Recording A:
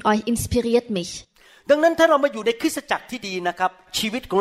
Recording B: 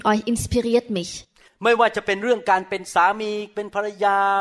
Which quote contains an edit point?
B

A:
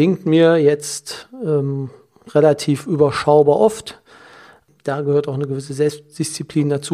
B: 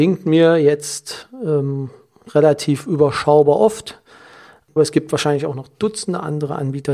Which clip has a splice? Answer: B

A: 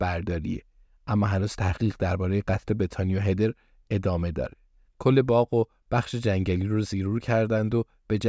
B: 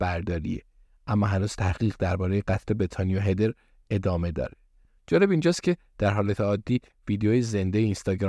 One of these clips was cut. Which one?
A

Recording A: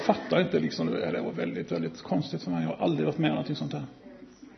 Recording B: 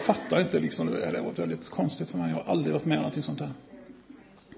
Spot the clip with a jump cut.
B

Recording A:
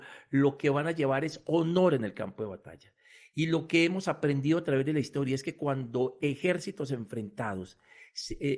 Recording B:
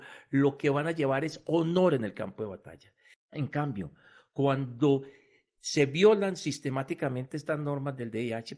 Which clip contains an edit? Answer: B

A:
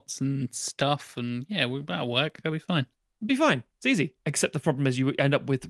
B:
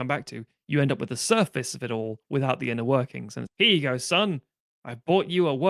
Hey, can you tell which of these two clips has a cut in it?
B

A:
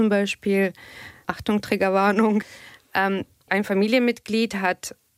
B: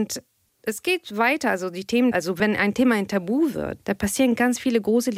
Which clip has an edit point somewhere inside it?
B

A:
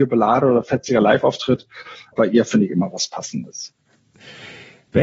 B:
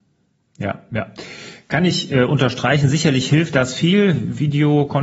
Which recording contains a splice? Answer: A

